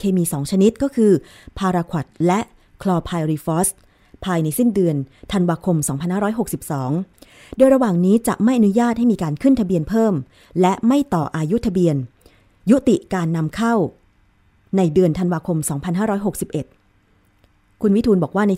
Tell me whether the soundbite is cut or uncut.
uncut